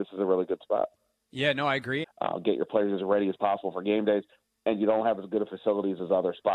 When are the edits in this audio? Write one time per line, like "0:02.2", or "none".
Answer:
0:02.0